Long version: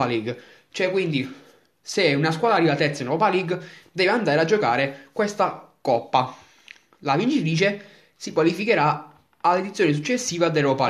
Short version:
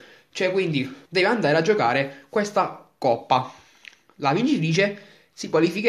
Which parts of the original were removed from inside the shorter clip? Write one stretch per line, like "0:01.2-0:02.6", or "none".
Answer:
0:01.4-0:03.9

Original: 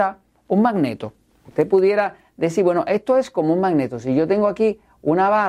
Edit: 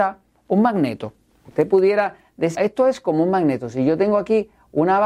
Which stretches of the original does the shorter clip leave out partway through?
0:02.5-0:02.8

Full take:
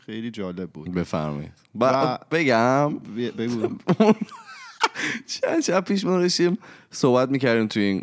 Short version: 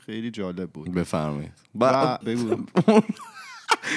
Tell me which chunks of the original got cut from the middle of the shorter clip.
0:02.2-0:03.3

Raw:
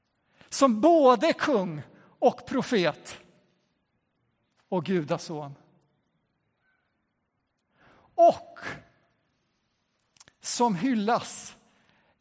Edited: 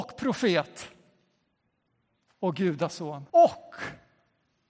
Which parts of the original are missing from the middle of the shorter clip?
0:05.6-0:08.1

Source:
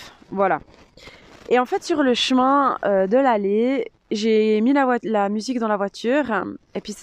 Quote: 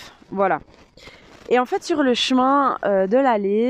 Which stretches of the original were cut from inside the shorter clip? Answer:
none

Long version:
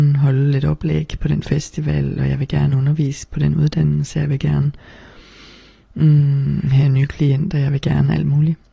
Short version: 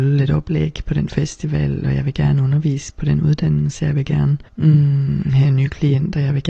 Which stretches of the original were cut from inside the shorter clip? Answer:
0:04.8-0:05.9

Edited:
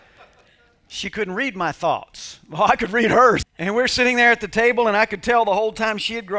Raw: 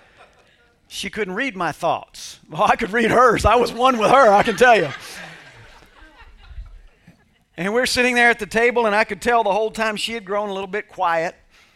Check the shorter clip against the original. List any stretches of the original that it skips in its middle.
0:03.4-0:07.4

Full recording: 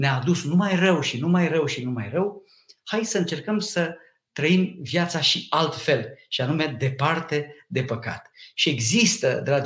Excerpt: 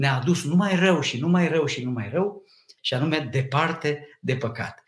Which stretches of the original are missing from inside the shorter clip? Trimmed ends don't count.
0:02.8-0:06.3

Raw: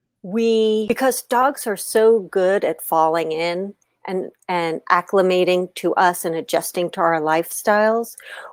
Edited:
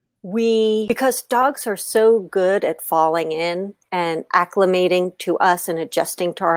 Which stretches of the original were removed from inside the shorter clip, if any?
0:03.9-0:04.4

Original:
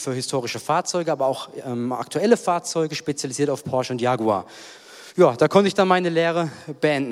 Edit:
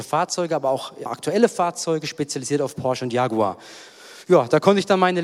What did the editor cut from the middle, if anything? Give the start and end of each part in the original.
0:01.6-0:01.9

